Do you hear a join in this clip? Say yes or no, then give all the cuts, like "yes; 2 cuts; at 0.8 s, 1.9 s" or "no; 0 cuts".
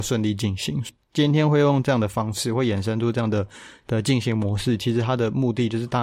no; 0 cuts